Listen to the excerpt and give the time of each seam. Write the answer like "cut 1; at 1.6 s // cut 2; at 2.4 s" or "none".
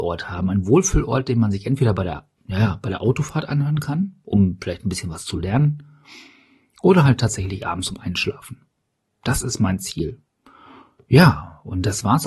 cut 1; at 2.4 s